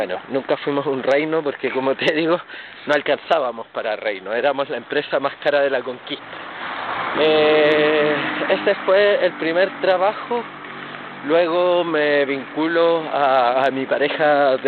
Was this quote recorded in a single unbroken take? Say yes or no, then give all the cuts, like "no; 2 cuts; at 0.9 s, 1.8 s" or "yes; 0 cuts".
no; 1 cut; at 7.1 s